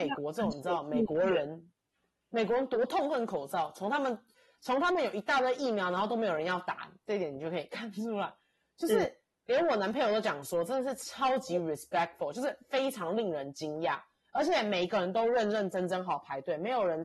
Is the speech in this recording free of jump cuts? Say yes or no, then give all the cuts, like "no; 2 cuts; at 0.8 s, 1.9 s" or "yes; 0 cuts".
no; 1 cut; at 16.1 s